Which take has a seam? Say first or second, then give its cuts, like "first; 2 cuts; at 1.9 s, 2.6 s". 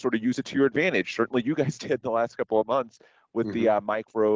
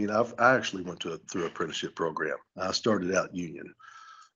second; 1 cut; at 2.5 s